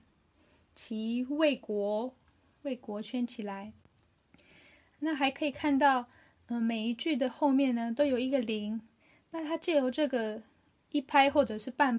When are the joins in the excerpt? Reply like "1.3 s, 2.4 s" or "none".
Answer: none

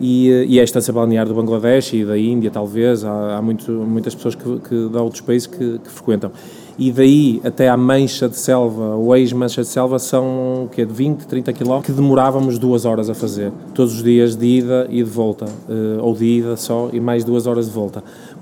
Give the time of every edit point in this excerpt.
11.8 s

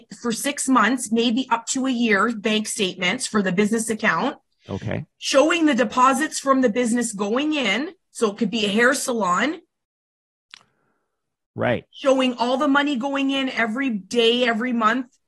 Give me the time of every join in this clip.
none

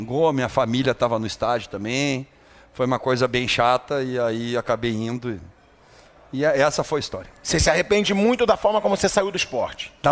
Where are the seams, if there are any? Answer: none

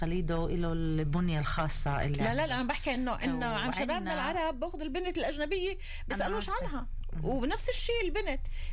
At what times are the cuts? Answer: none

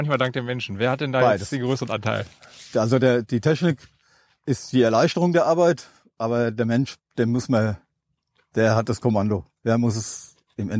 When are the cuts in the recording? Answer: none

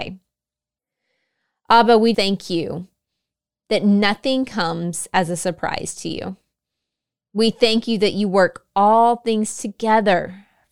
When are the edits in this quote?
2.1 s

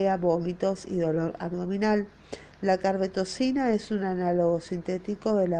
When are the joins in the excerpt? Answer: 2.5 s

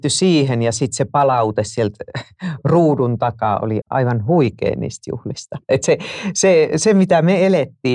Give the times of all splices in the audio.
3.8 s

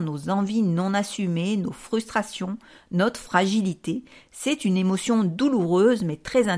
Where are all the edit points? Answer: none

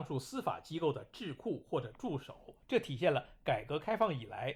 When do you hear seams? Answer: 2.6 s

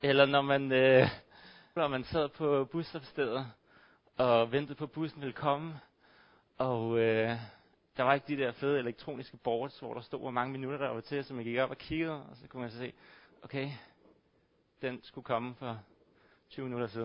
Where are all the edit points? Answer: 1.8 s

